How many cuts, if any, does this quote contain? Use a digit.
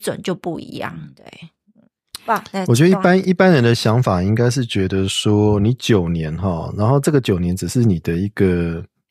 0